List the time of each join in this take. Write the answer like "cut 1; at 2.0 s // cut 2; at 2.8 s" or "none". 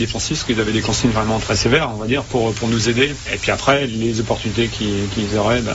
none